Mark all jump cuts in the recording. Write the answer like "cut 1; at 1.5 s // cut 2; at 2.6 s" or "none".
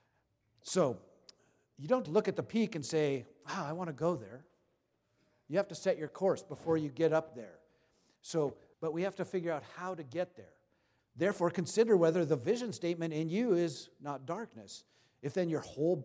cut 1; at 2.1 s // cut 2; at 8.7 s // cut 3; at 11.0 s